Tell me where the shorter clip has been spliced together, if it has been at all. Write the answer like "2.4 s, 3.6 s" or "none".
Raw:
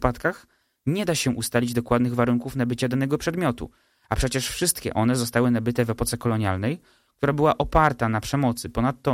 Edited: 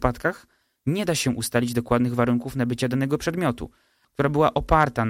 4.0 s